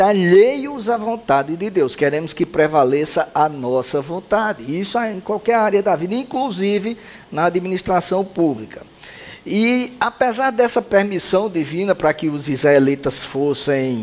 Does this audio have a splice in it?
no; 0 cuts

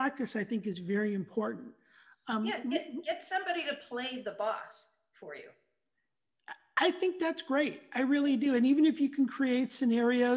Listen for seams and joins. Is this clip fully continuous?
yes; 0 cuts

